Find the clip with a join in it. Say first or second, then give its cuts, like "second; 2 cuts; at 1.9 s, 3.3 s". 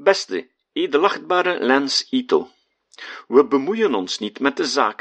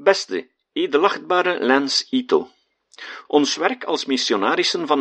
second; 1 cut; at 3.3 s